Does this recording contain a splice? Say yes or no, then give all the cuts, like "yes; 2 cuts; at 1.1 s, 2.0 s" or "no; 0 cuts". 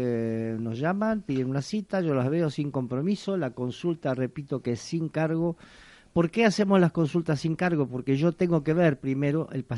no; 0 cuts